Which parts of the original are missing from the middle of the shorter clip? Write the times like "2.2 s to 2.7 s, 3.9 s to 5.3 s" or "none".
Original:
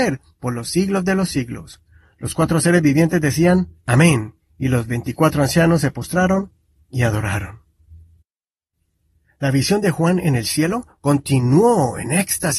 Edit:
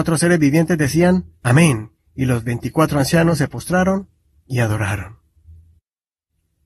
none